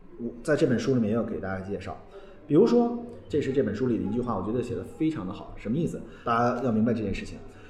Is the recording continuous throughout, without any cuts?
no; 2 cuts; at 3.3 s, 6.2 s

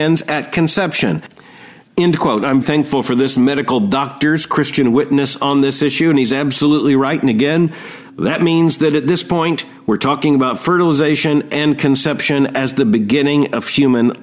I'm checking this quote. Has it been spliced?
yes; 1 cut; at 2.6 s

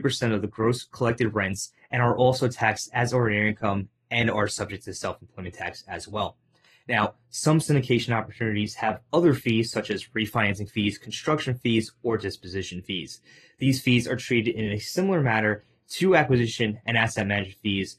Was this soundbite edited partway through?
no; 0 cuts

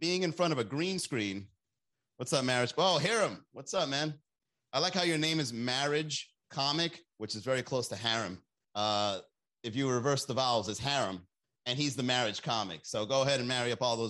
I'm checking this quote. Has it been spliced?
yes; 2 cuts; at 7.1 s, 8.6 s

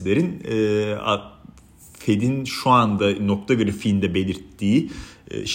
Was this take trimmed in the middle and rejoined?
no; 0 cuts

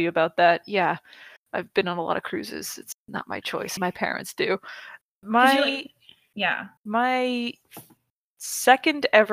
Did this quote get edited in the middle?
yes; 3 cuts; at 3.8 s, 5.1 s, 6.8 s

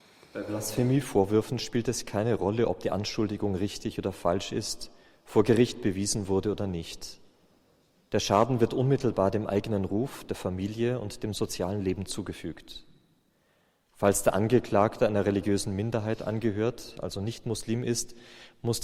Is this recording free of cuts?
yes; 0 cuts

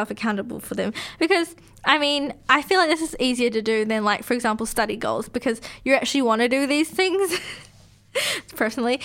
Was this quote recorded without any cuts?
yes; 0 cuts

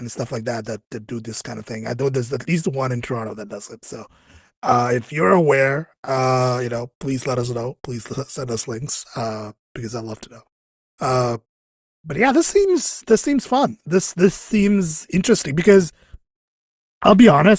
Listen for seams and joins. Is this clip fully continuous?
yes; 0 cuts

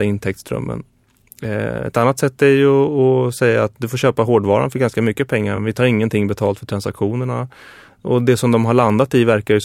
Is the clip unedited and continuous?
yes; 0 cuts

